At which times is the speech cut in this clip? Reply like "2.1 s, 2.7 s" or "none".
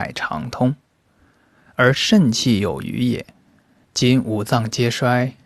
3.8 s